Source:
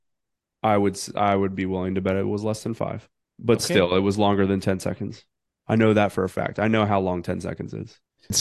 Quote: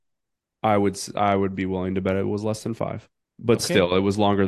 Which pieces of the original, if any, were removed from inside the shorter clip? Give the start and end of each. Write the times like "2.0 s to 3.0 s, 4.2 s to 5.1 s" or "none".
none